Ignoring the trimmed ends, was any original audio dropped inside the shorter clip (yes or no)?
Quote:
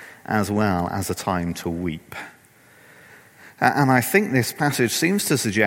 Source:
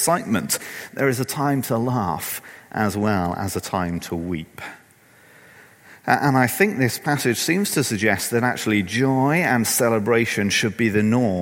no